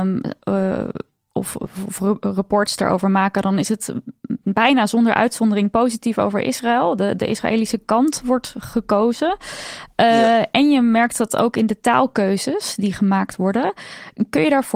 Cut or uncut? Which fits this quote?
uncut